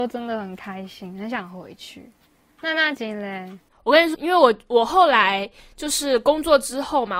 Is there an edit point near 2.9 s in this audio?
yes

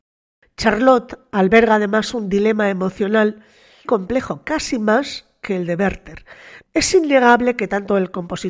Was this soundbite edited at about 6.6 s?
yes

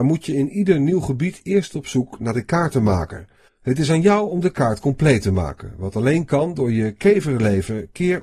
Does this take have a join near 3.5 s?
yes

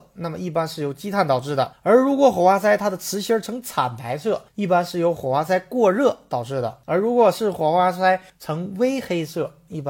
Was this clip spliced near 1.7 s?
no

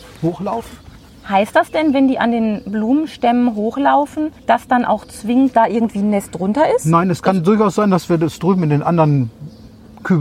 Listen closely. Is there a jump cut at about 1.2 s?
no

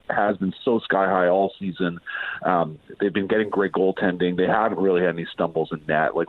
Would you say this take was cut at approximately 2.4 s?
no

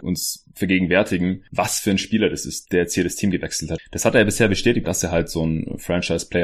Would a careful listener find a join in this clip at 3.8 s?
yes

